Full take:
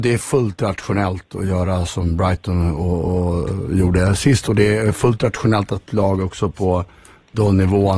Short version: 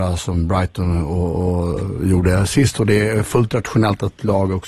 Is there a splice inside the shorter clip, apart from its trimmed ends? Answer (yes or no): no